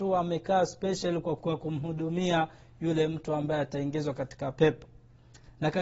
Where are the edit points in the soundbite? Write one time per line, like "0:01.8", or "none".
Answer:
0:01.4